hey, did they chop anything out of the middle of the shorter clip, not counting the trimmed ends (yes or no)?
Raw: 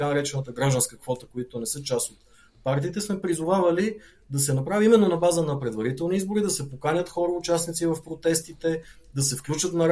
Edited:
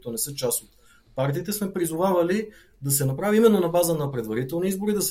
no